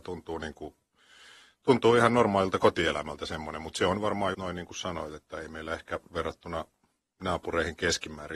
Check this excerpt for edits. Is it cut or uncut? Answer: cut